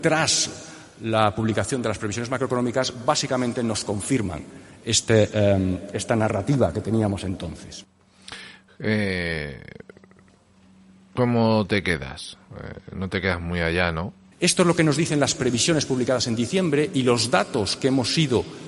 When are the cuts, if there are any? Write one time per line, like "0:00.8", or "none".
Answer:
0:14.3